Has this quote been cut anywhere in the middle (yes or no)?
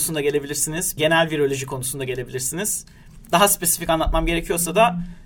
yes